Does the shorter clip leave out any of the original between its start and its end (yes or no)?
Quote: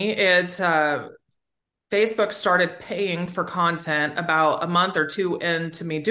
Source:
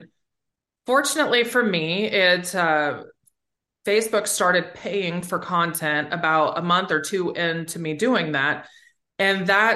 no